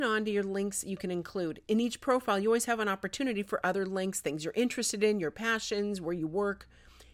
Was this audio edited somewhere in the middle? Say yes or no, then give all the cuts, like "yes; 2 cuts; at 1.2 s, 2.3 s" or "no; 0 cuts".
no; 0 cuts